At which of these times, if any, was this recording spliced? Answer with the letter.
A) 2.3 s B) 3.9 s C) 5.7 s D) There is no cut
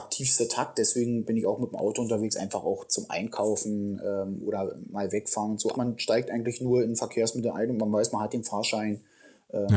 C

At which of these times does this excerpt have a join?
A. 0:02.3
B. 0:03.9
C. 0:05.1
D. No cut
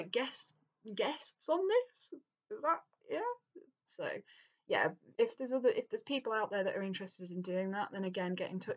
B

